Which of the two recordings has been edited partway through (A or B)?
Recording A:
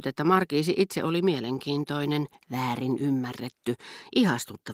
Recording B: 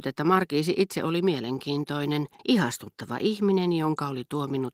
B